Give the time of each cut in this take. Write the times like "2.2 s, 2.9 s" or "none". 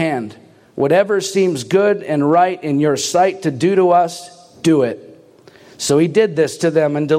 none